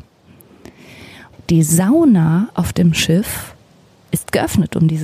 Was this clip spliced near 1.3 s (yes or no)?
yes